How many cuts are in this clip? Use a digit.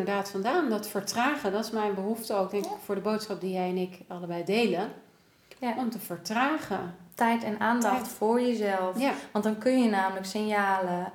0